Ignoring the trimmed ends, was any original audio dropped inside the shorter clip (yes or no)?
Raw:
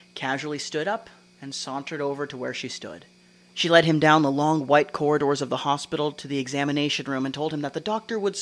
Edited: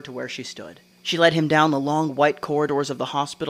yes